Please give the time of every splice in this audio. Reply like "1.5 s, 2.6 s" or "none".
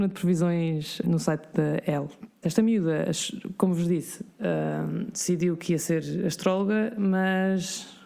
1.0 s, 2.4 s